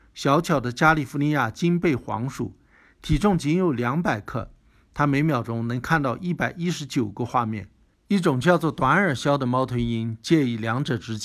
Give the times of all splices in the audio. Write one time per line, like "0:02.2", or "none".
0:07.9